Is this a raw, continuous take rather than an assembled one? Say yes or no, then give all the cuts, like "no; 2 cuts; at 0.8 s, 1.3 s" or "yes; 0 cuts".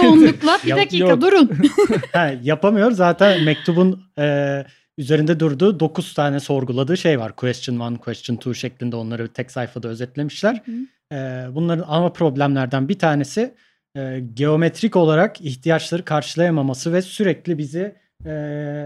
yes; 0 cuts